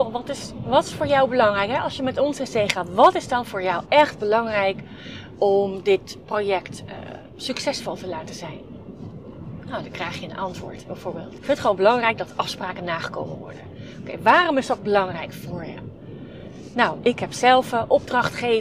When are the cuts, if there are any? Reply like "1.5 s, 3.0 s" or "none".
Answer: 11.4 s

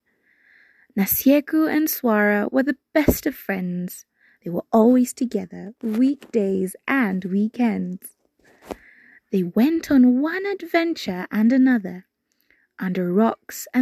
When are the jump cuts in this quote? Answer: none

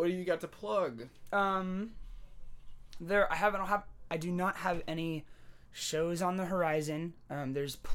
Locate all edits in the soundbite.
none

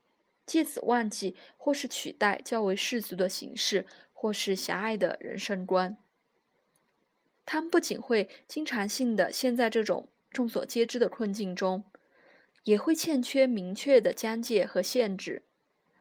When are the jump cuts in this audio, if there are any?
7.3 s

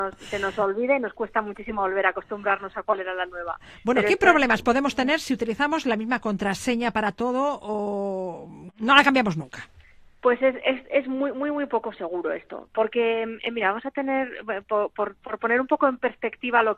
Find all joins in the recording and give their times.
none

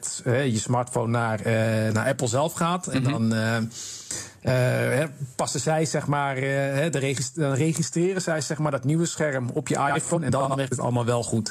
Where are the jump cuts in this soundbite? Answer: none

